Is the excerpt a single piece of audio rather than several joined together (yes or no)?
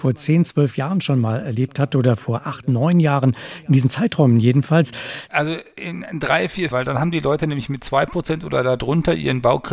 no